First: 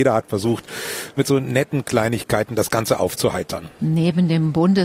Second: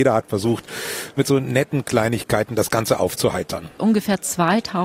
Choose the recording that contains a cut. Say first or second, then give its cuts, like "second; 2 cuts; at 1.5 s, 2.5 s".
second; 1 cut; at 3.8 s